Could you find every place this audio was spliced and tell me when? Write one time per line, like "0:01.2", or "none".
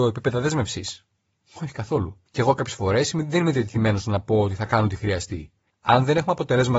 0:02.3
0:05.7